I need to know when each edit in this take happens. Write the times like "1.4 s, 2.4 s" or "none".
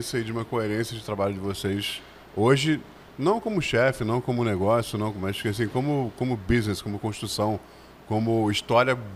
none